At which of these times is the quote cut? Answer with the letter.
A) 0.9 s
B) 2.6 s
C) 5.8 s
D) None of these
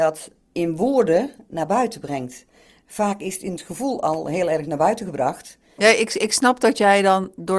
C